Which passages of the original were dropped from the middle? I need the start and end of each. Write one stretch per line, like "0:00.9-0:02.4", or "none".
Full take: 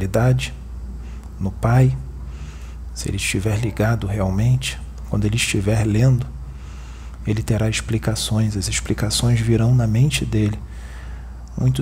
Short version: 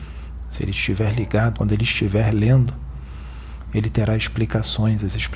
0:04.0-0:05.1